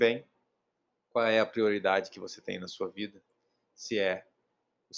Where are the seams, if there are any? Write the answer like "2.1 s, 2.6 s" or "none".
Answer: none